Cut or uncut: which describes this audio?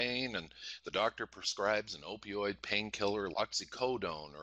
cut